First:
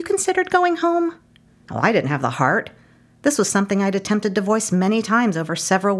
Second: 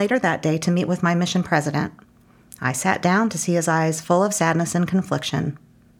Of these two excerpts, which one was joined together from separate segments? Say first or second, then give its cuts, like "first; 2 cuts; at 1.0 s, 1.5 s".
first; 1 cut; at 1.5 s